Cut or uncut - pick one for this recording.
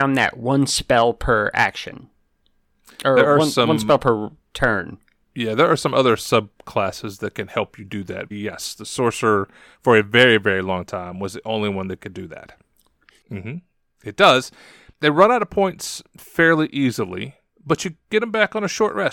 cut